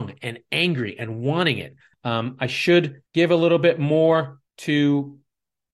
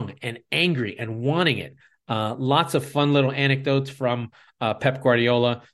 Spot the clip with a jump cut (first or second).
first